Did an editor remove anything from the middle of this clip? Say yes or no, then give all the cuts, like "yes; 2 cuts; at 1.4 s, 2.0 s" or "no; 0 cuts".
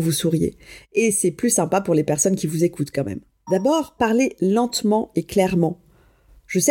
yes; 1 cut; at 3.5 s